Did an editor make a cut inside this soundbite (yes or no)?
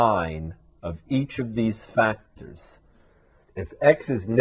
yes